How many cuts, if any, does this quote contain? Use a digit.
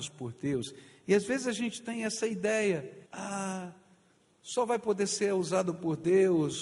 1